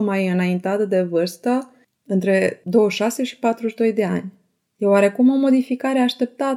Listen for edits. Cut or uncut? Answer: uncut